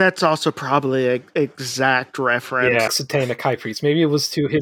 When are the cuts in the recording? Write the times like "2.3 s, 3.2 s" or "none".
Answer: 2.9 s